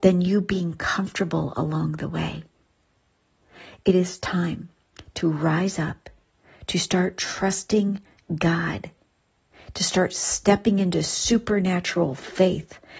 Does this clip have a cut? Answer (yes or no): no